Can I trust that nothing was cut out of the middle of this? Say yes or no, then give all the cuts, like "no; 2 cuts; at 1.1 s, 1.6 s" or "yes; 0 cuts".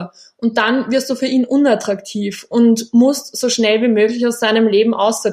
yes; 0 cuts